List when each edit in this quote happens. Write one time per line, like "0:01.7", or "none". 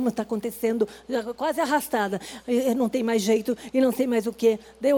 none